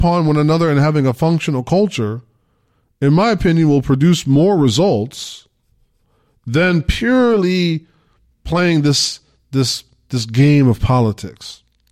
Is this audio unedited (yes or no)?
yes